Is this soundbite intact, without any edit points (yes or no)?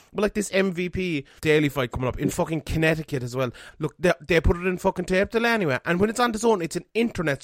no